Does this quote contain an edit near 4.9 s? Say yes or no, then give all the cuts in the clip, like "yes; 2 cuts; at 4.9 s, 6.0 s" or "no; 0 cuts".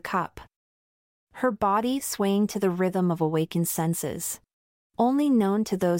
yes; 1 cut; at 4.9 s